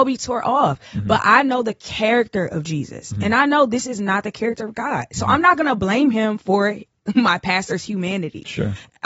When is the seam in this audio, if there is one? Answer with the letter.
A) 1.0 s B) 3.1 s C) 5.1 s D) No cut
D